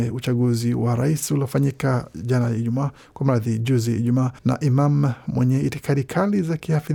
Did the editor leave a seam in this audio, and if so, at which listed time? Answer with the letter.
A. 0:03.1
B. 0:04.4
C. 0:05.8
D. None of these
B